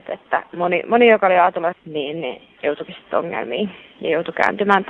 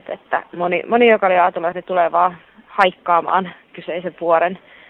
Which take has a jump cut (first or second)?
first